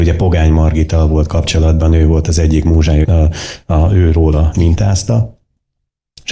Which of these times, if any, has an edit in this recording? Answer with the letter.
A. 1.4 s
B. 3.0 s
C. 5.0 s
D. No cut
B